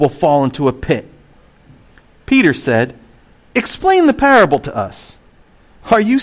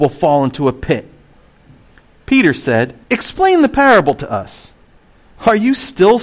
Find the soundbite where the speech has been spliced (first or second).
second